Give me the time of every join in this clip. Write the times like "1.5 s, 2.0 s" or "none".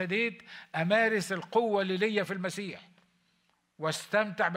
none